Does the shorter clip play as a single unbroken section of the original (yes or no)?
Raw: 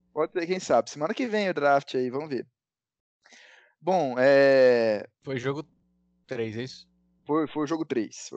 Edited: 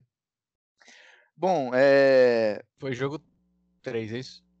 yes